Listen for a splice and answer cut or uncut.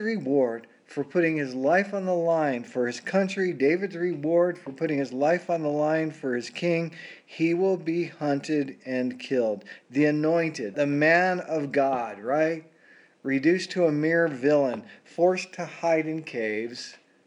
cut